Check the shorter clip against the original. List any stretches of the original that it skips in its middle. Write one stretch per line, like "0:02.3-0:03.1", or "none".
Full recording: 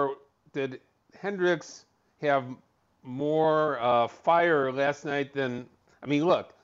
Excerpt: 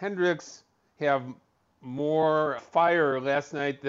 0:03.8-0:04.1